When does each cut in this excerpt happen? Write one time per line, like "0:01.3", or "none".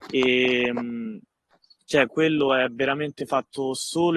none